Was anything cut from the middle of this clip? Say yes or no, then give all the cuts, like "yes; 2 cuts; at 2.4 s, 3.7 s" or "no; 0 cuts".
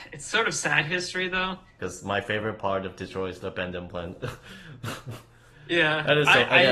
yes; 1 cut; at 1.8 s